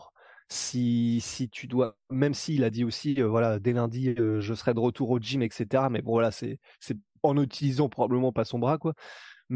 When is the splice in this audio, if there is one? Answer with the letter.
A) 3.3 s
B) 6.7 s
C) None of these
C